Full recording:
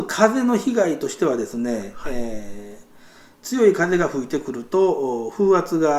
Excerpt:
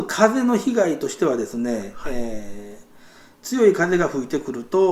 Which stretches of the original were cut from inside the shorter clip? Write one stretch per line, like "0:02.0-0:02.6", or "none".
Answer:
none